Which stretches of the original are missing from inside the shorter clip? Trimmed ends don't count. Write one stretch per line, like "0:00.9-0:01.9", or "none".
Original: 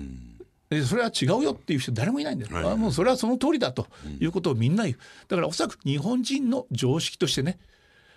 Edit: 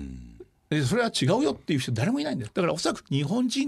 0:02.5-0:05.2